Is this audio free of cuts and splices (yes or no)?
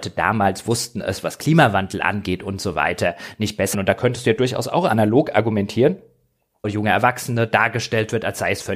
no